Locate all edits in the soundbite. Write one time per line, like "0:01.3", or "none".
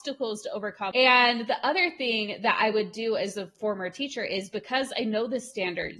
0:00.9